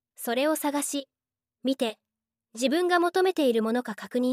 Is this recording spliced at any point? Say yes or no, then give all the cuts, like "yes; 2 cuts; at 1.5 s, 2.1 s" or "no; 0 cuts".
no; 0 cuts